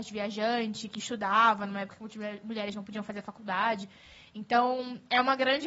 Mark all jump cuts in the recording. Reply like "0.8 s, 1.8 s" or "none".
none